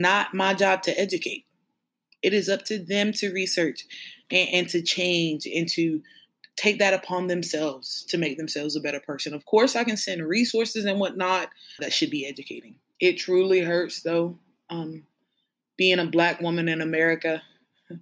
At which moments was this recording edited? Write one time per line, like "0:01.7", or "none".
0:11.8
0:13.0

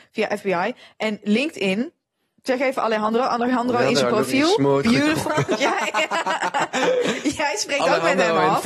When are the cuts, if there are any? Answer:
0:05.3

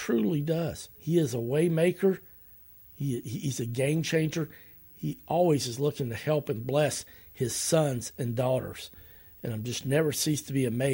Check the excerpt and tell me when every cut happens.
0:00.9

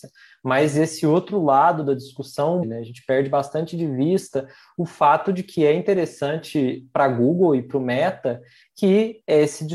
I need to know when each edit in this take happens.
0:02.6

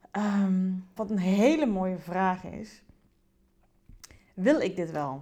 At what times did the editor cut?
0:01.0

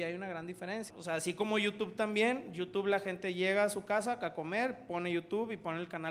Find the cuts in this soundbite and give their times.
0:00.9

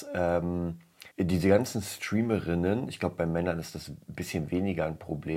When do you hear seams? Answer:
0:01.1

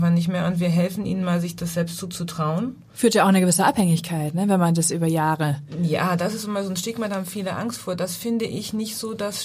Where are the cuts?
none

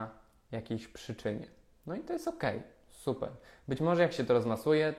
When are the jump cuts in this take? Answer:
none

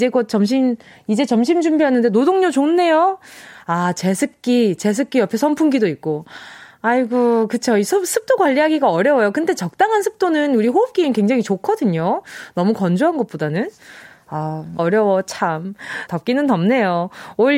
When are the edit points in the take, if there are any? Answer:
0:14.8
0:16.1

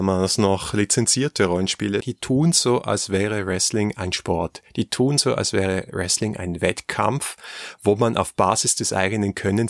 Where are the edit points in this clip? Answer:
0:02.0

